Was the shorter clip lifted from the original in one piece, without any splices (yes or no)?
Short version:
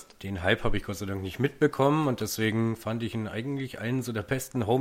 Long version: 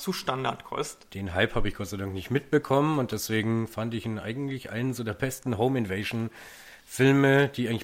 yes